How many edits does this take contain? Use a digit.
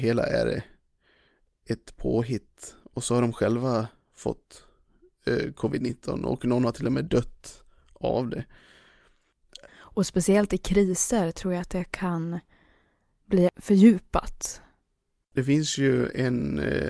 1